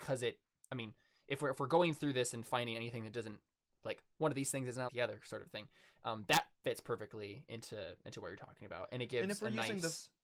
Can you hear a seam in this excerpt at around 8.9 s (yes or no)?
no